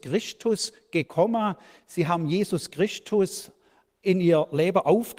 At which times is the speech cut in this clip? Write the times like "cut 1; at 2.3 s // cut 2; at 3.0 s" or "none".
none